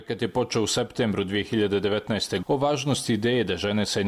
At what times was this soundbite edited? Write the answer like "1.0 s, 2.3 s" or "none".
2.4 s